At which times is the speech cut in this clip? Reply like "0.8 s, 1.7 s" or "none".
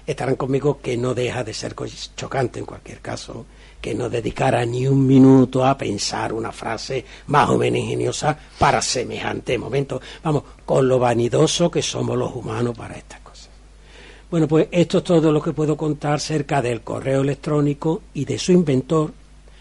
none